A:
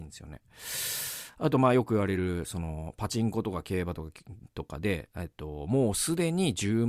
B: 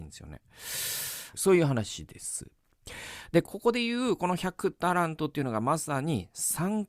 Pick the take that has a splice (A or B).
B